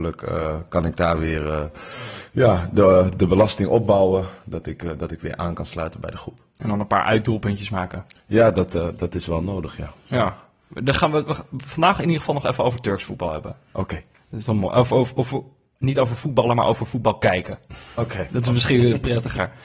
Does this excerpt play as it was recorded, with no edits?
yes; 0 cuts

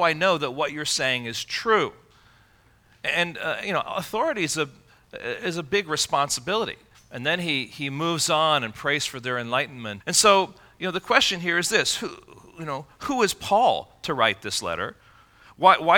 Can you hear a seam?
yes; 2 cuts; at 6.9 s, 10.0 s

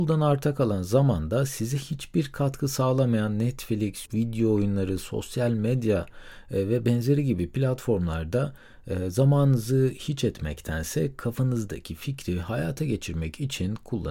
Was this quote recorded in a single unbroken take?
no; 1 cut; at 4.1 s

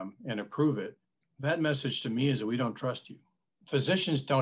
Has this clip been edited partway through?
yes; 1 cut; at 1.2 s

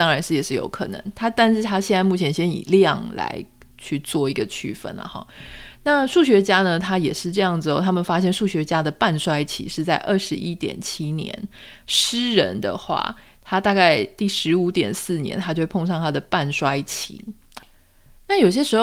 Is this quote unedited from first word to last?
yes; 0 cuts

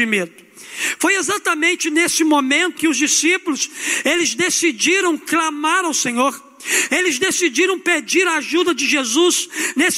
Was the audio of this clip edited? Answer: yes; 1 cut; at 2.7 s

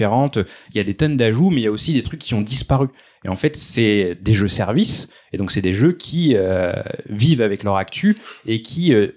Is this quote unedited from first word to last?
yes; 0 cuts

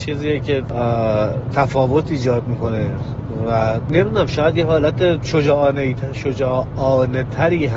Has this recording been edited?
no; 0 cuts

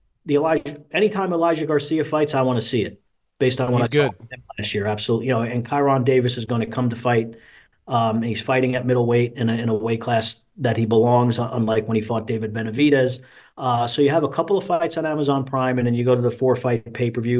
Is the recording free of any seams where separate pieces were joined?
yes; 0 cuts

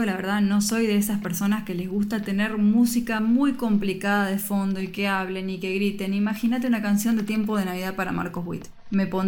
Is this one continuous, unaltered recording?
yes; 0 cuts

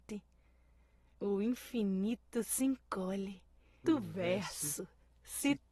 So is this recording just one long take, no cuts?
no; 1 cut; at 3.8 s

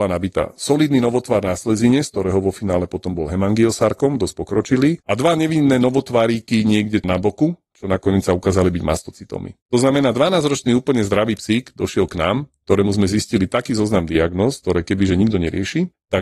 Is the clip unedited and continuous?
no; 1 cut; at 7.0 s

